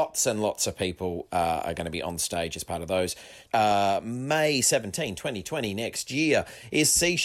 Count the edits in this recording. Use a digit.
1